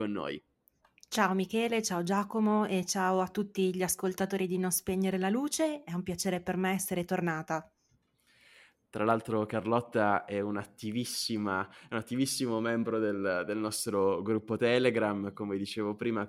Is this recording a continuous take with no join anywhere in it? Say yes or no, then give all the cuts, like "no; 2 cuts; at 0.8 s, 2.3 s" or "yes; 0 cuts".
yes; 0 cuts